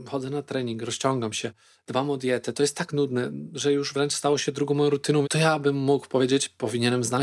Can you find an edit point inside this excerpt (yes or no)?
yes